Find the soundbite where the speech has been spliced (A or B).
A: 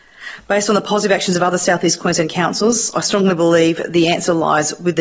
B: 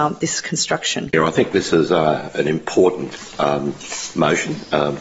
B